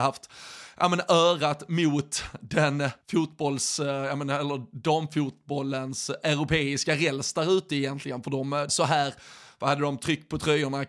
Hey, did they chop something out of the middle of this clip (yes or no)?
yes